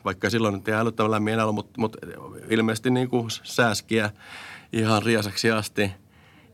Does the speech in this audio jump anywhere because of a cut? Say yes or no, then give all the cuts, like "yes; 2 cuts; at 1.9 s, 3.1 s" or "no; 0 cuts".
no; 0 cuts